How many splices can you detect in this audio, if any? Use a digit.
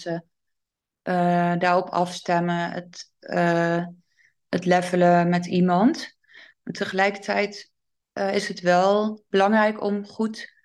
1